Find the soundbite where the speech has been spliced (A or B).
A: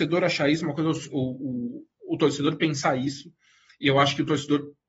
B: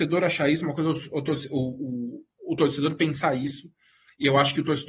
A